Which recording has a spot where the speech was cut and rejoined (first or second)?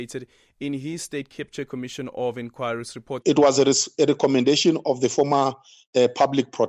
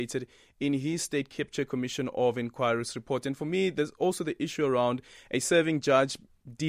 first